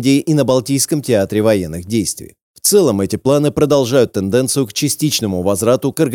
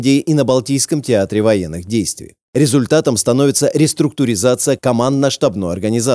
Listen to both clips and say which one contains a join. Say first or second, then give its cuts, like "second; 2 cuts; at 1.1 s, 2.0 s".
first; 1 cut; at 2.4 s